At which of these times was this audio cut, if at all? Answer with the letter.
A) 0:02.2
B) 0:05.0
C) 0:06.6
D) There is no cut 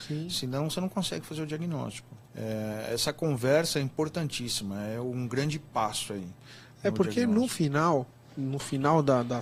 A